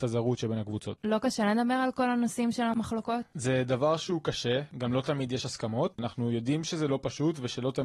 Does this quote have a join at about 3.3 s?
no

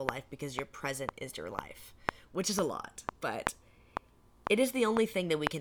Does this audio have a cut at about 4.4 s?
no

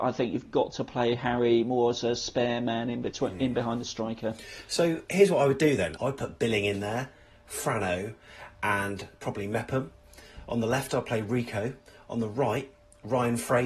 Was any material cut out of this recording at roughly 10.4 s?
no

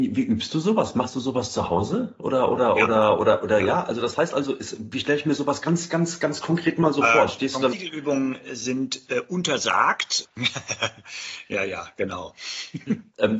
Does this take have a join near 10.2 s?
yes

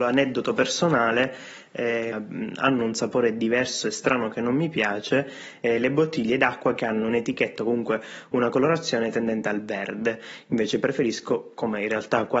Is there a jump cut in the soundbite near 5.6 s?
no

